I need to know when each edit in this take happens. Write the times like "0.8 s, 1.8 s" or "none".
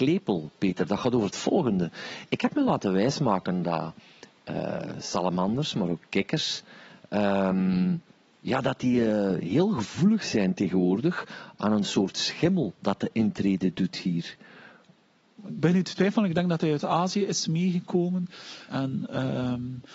15.4 s, 18.7 s